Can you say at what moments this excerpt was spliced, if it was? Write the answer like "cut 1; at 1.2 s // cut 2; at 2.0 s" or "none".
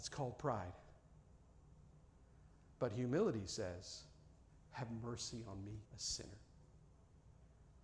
cut 1; at 4.5 s // cut 2; at 5.8 s